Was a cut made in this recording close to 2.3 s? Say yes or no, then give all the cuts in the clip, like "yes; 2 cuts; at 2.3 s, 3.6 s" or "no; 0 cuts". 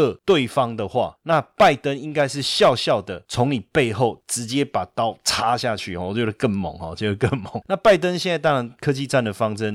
no; 1 cut; at 7.6 s